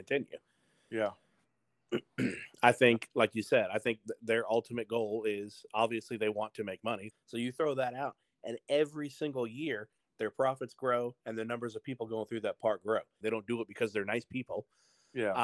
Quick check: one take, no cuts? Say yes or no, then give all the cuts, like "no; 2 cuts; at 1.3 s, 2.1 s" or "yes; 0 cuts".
no; 2 cuts; at 7.1 s, 13.2 s